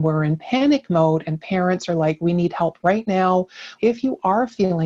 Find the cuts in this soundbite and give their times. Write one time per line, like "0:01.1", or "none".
0:03.8